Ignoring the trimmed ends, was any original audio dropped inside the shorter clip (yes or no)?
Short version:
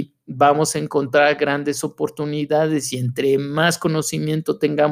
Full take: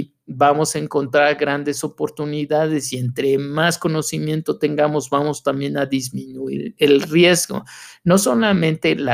no